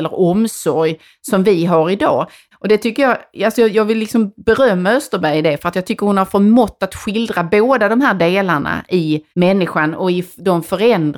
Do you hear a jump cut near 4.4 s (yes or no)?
no